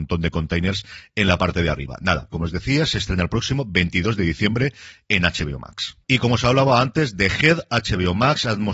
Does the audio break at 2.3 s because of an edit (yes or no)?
yes